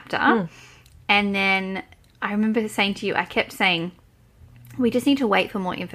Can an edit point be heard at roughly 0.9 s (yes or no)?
no